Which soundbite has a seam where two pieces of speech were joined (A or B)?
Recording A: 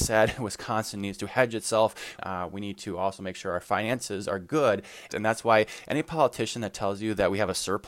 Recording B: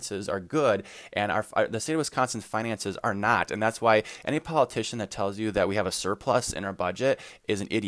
A